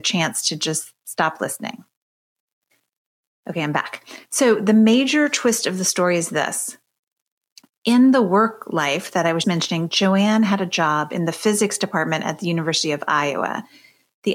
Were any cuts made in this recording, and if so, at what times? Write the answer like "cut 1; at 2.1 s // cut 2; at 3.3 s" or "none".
cut 1; at 9.4 s